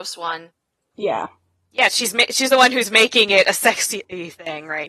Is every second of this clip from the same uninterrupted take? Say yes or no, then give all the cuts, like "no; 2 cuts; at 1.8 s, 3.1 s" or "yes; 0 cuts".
yes; 0 cuts